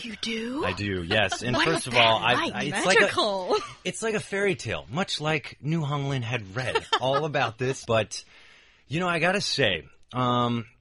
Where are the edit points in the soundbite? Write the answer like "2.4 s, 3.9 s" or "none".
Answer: 7.8 s